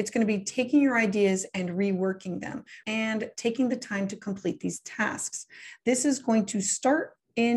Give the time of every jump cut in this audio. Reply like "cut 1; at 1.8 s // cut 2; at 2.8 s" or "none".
cut 1; at 2.8 s